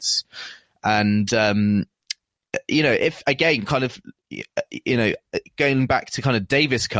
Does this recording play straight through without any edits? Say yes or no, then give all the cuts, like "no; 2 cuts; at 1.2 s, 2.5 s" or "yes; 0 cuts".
yes; 0 cuts